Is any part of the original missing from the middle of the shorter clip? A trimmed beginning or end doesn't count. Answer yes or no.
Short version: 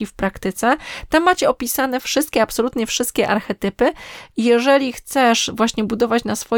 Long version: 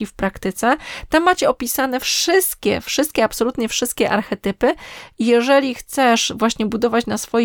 yes